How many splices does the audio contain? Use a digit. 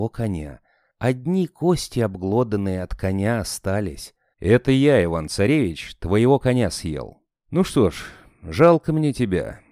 1